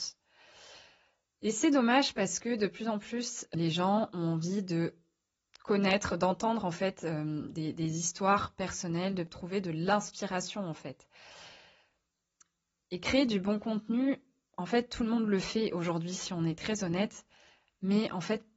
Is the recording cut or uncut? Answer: uncut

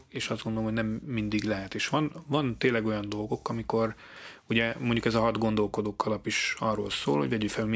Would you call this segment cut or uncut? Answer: uncut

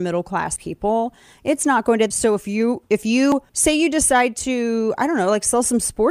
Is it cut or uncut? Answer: cut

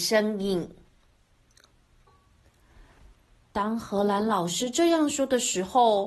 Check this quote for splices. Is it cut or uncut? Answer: cut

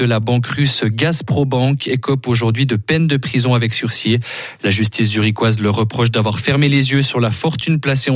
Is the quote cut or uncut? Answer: uncut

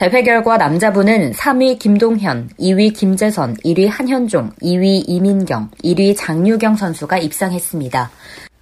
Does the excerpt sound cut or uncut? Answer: cut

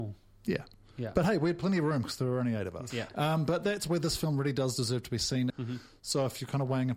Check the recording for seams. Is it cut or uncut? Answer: cut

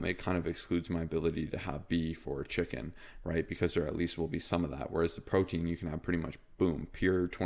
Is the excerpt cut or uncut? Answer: uncut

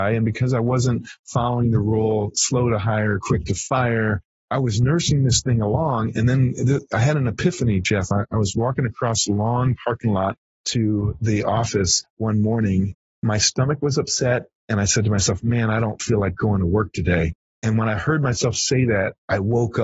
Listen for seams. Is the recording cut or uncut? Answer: uncut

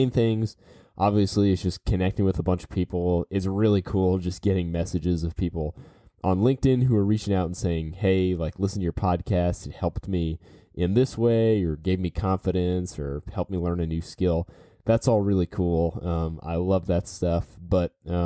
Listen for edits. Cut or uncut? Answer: uncut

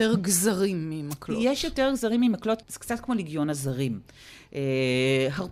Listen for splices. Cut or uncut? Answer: cut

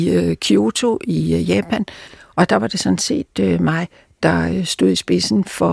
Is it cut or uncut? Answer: uncut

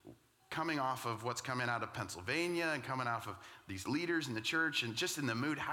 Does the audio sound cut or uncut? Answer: uncut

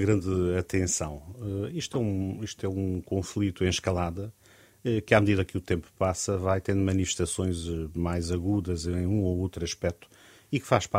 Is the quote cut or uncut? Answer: uncut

